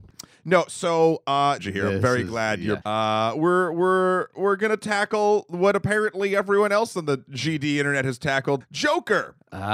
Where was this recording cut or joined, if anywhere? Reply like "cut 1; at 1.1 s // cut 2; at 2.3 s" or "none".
cut 1; at 1.6 s // cut 2; at 2.8 s // cut 3; at 8.6 s

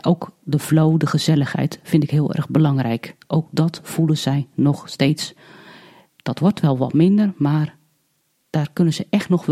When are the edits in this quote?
none

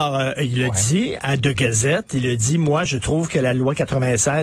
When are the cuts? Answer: none

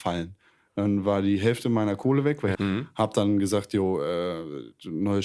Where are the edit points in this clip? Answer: cut 1; at 2.5 s

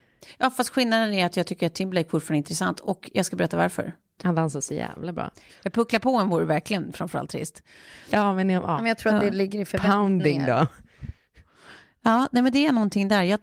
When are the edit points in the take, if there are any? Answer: cut 1; at 4.2 s // cut 2; at 5.5 s

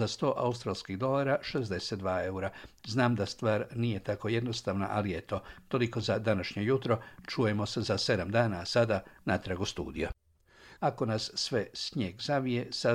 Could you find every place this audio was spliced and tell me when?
cut 1; at 2.8 s // cut 2; at 10.8 s

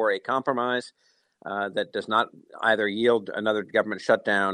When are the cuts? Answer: none

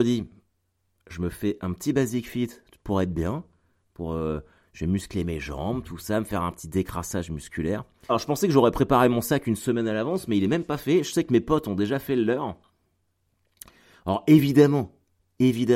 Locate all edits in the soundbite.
cut 1; at 8.1 s

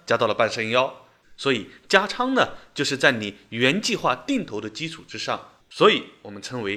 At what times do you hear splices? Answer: cut 1; at 1.2 s // cut 2; at 5.6 s

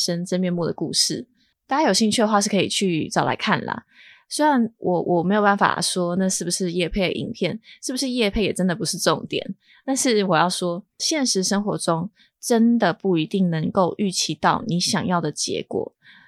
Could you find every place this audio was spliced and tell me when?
none

